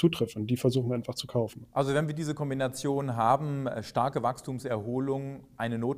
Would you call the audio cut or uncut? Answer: cut